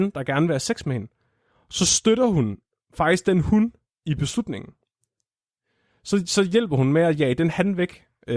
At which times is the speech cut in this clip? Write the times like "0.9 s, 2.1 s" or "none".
none